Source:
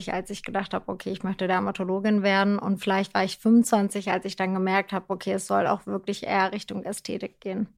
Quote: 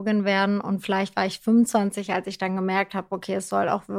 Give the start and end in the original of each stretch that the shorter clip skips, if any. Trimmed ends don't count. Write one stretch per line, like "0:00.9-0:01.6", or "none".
none